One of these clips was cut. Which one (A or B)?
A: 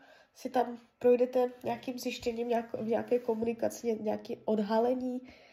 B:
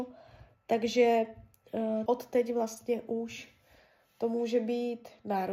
B